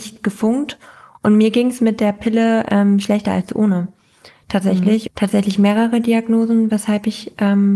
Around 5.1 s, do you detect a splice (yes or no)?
yes